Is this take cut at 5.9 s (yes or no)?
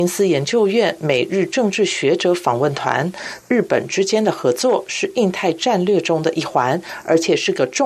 no